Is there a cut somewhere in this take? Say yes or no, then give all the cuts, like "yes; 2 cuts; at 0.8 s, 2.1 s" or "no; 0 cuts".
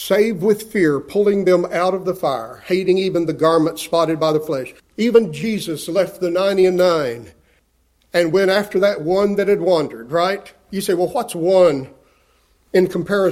yes; 1 cut; at 4.8 s